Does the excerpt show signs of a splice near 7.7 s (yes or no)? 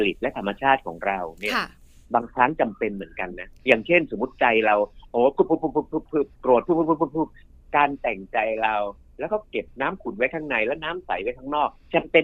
no